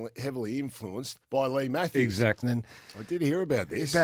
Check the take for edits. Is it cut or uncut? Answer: cut